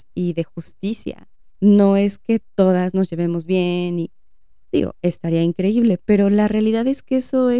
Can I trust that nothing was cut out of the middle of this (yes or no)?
no